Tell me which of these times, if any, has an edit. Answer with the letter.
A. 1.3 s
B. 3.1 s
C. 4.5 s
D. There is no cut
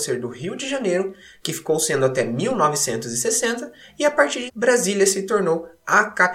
C